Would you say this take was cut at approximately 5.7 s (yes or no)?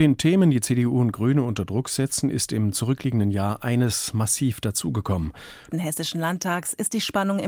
yes